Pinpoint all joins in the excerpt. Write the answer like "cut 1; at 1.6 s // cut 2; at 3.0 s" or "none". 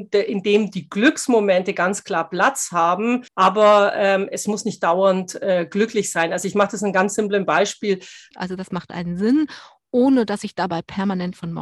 cut 1; at 3.3 s // cut 2; at 8.3 s